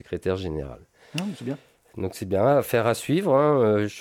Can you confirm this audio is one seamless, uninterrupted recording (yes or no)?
yes